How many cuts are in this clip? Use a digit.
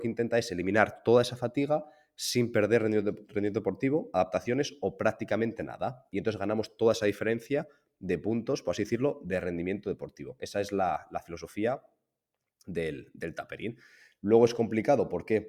1